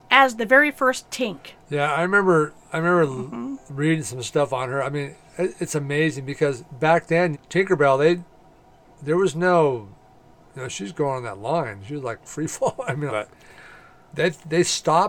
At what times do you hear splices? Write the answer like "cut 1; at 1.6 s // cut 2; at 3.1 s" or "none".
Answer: cut 1; at 7.3 s // cut 2; at 13.1 s